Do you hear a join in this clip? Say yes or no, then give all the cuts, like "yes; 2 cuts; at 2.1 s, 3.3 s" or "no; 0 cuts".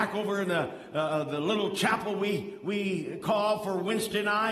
no; 0 cuts